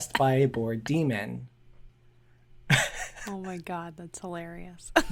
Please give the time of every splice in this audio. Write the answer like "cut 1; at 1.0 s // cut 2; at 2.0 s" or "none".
cut 1; at 1.9 s